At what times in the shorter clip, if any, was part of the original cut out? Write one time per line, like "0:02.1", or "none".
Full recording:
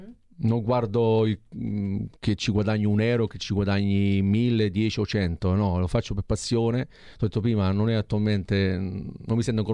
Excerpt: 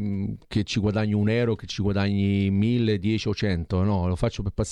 none